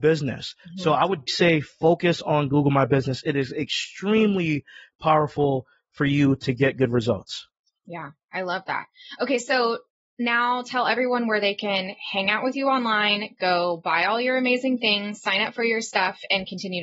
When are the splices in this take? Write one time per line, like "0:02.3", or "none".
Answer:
0:01.3